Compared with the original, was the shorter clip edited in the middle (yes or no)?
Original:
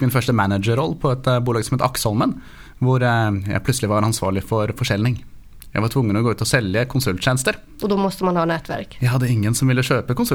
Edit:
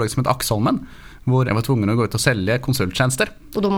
yes